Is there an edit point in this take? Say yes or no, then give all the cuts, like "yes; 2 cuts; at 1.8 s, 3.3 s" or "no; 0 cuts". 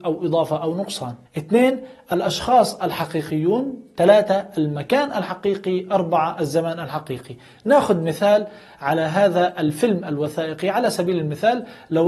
yes; 1 cut; at 1.3 s